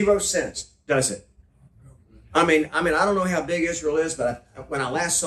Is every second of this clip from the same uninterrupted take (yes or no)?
yes